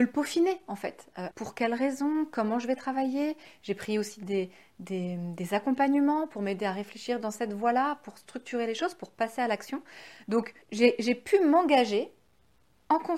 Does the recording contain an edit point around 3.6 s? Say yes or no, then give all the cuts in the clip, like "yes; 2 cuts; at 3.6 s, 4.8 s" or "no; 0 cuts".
no; 2 cuts; at 1.3 s, 10.6 s